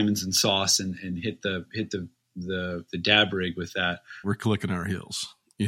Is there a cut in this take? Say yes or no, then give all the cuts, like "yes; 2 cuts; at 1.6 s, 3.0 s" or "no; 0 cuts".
yes; 2 cuts; at 1.0 s, 4.2 s